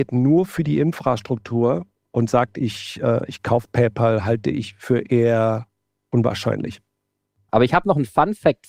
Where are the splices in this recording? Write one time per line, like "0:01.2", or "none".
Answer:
0:07.5